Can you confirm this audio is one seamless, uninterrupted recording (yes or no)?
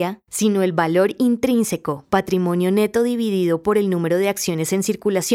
yes